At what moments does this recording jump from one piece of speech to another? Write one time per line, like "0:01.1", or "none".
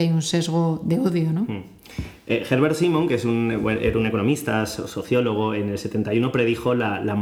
none